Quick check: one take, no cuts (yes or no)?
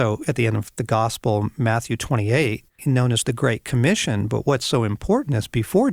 no